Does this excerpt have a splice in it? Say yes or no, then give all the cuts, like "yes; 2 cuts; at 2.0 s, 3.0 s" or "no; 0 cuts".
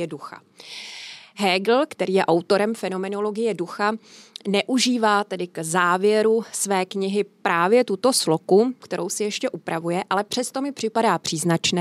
yes; 1 cut; at 8.8 s